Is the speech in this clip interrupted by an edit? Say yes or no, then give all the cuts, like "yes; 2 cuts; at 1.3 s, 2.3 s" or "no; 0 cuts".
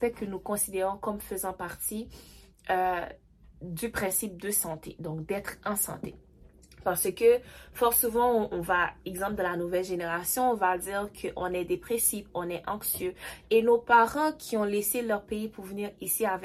no; 0 cuts